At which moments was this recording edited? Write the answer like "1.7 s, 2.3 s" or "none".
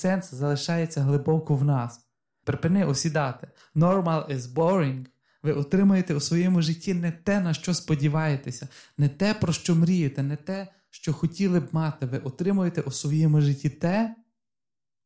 2.4 s